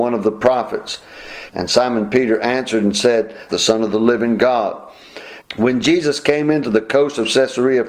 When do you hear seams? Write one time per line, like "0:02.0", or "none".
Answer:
0:01.5
0:03.5
0:05.4